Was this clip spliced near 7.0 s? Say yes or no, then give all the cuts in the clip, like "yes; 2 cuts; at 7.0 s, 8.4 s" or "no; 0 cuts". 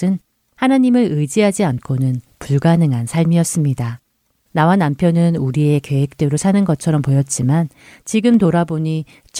no; 1 cut; at 4.4 s